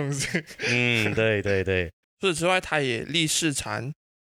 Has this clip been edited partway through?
no; 0 cuts

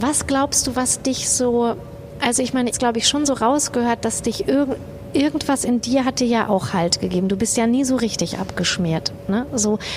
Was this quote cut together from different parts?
yes; 1 cut; at 2.7 s

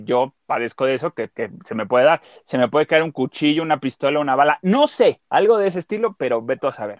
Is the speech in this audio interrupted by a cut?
yes; 1 cut; at 1.3 s

